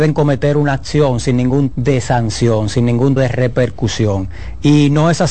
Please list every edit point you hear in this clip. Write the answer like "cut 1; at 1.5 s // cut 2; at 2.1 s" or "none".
cut 1; at 1.7 s // cut 2; at 3.2 s

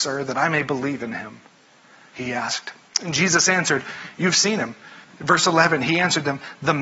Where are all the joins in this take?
cut 1; at 5.0 s

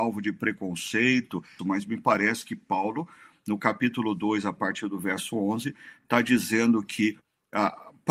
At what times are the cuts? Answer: cut 1; at 1.6 s

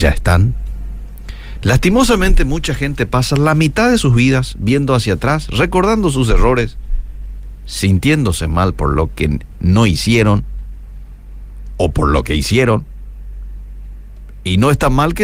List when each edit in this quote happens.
cut 1; at 1.6 s

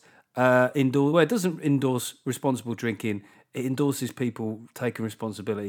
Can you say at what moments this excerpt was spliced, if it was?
none

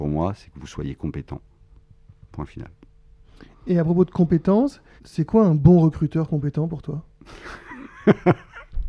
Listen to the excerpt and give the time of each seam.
cut 1; at 5.0 s

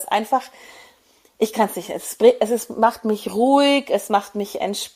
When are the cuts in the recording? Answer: none

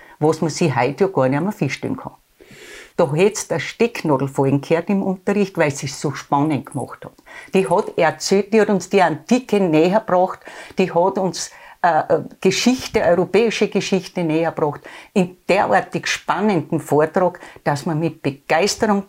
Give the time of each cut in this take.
cut 1; at 2.9 s

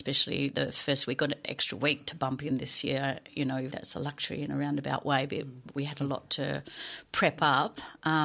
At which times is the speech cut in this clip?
cut 1; at 3.7 s

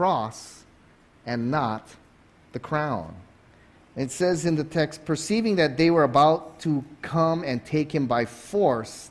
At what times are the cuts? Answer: cut 1; at 3.7 s

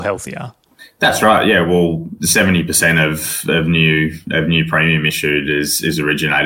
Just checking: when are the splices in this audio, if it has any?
cut 1; at 2.2 s

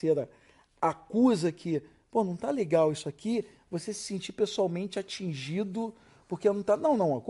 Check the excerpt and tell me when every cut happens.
none

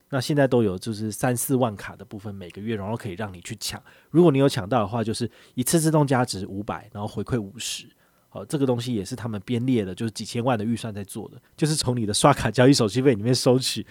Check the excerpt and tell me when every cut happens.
cut 1; at 11.5 s

